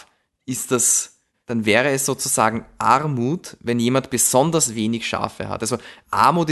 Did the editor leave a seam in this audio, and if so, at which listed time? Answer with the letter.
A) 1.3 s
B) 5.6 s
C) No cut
A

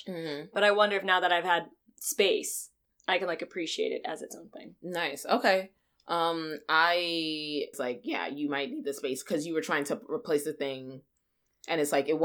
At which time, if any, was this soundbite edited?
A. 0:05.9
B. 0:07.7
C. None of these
B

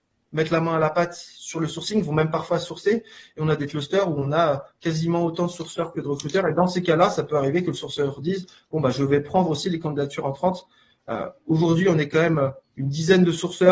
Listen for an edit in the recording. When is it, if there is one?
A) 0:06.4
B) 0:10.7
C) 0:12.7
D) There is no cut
C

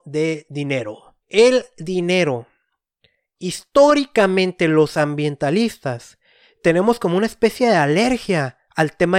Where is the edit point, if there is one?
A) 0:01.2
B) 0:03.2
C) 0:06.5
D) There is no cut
A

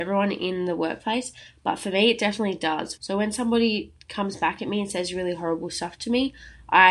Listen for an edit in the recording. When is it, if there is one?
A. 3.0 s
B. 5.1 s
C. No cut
A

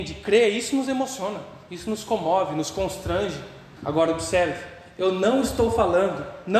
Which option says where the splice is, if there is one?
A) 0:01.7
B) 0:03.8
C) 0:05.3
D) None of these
B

